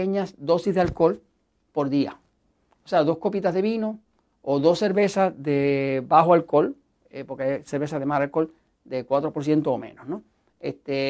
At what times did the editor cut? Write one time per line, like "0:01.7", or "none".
none